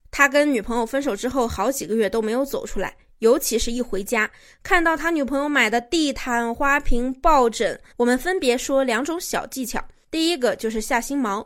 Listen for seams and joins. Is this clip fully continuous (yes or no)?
no